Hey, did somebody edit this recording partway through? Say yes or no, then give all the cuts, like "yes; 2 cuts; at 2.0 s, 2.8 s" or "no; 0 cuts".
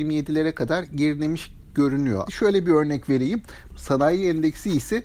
yes; 2 cuts; at 2.3 s, 3.7 s